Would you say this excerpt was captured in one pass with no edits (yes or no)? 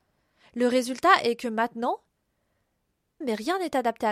no